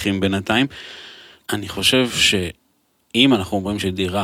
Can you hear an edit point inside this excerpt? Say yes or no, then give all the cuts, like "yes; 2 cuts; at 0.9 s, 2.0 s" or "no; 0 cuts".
yes; 1 cut; at 1.4 s